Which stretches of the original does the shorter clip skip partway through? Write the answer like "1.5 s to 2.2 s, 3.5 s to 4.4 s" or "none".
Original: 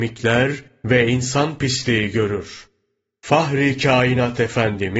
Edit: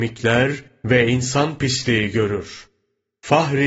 none